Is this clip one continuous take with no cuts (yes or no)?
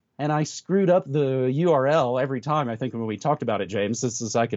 yes